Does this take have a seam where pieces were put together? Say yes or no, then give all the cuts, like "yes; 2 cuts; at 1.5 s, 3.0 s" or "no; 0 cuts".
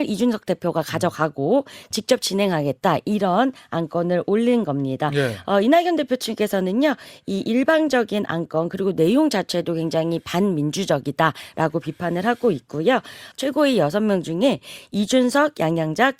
yes; 2 cuts; at 1.9 s, 13.3 s